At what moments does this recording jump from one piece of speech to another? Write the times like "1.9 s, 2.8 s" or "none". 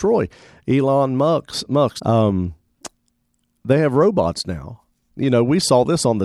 2.0 s, 5.2 s